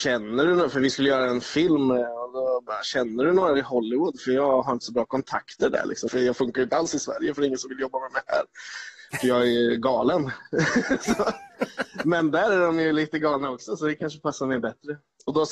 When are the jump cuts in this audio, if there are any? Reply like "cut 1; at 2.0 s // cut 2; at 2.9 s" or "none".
cut 1; at 6.1 s

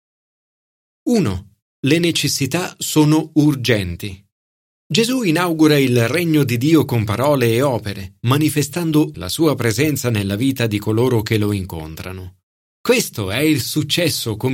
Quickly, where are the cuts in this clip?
cut 1; at 4.8 s // cut 2; at 9.1 s

